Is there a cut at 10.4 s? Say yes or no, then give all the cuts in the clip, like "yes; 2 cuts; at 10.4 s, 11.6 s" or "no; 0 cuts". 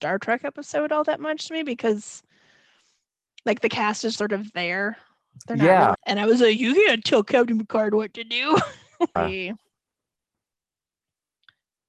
no; 3 cuts; at 4.2 s, 5.9 s, 9.2 s